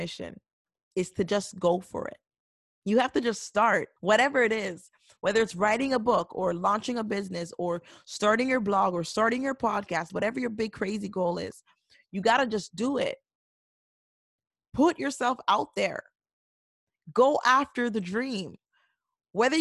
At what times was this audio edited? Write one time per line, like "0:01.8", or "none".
0:04.0
0:10.1